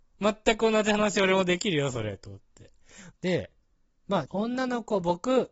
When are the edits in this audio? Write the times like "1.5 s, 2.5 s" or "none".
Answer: 3.1 s, 4.3 s